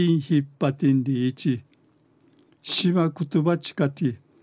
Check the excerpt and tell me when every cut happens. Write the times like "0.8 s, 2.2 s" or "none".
none